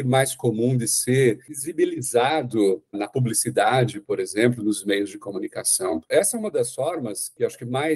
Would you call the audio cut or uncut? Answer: cut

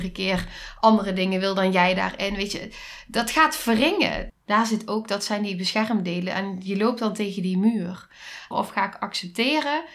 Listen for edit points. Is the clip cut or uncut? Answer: cut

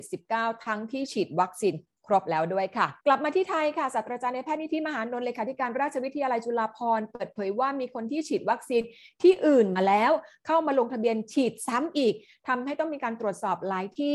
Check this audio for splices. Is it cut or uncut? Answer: cut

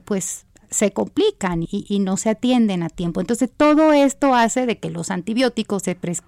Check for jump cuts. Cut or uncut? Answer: cut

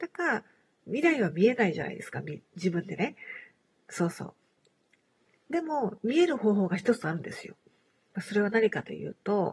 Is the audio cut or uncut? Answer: uncut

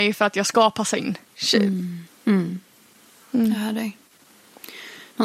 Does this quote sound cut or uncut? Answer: cut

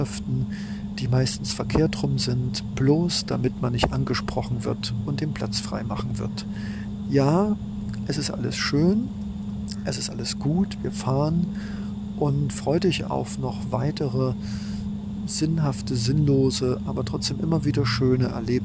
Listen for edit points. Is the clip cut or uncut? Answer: cut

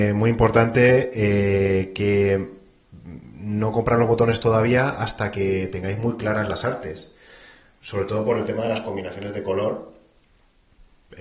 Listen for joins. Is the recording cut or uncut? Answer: uncut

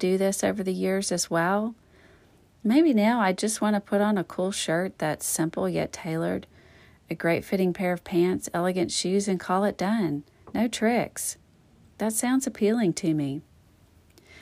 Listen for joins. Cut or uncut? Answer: uncut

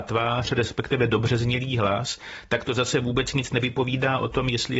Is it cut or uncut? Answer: uncut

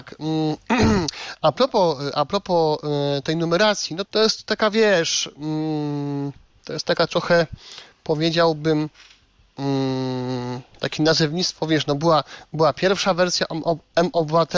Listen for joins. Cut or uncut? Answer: cut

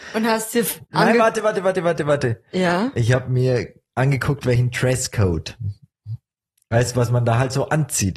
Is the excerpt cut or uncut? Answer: uncut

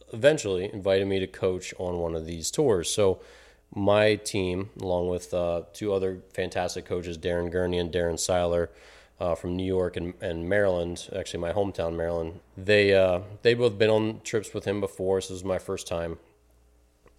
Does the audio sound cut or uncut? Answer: cut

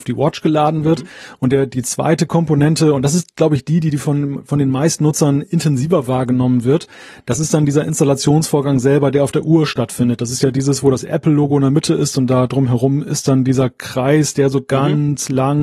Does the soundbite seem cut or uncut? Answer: uncut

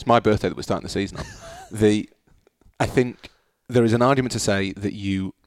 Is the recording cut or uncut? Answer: uncut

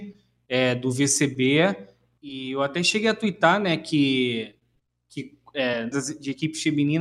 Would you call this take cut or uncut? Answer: cut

